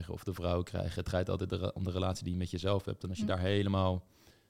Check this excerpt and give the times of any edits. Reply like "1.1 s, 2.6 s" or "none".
none